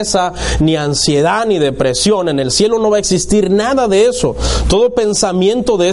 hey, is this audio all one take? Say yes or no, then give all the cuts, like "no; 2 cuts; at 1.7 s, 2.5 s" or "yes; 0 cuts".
yes; 0 cuts